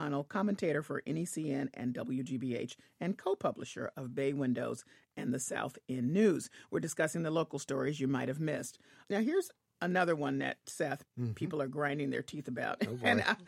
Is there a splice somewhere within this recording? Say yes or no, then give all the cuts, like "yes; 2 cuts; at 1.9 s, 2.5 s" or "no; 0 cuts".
no; 0 cuts